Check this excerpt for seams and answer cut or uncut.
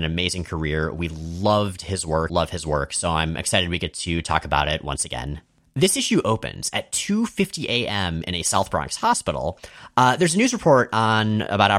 cut